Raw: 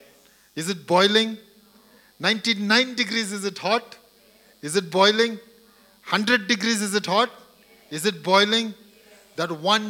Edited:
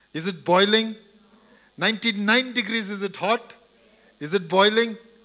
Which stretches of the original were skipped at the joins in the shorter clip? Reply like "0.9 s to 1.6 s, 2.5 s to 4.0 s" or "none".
none